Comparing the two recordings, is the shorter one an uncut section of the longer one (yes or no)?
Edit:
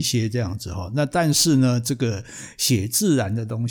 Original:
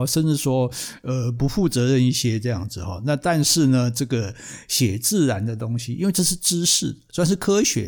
yes